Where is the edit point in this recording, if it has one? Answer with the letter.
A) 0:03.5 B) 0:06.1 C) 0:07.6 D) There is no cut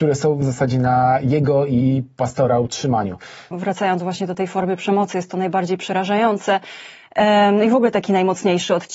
A